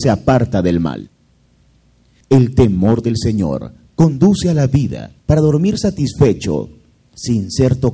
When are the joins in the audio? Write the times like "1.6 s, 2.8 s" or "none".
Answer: 2.2 s, 5.2 s